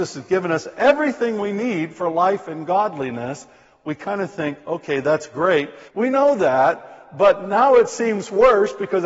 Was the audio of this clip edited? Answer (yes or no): yes